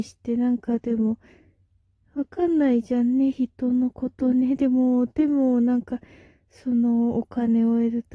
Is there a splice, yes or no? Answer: no